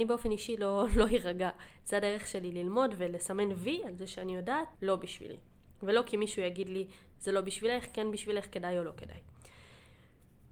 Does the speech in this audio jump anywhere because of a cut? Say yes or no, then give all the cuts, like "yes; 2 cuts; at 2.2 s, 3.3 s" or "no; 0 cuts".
yes; 1 cut; at 4.8 s